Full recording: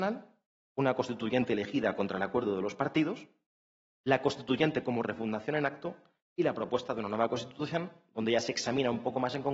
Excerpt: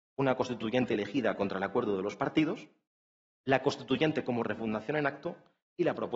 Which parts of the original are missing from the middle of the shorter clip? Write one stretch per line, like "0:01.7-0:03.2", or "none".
none